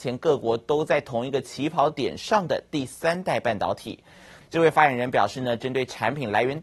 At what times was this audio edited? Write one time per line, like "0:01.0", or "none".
0:04.4